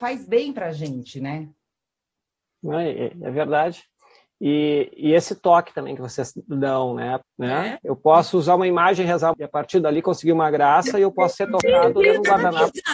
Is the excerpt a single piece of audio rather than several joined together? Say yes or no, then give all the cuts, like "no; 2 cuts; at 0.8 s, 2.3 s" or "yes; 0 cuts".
no; 2 cuts; at 7.2 s, 9.3 s